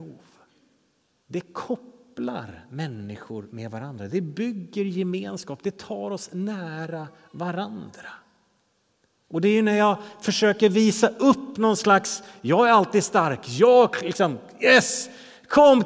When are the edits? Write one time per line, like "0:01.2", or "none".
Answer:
none